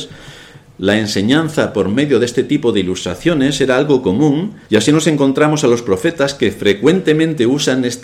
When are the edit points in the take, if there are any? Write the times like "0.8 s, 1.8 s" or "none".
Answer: 4.6 s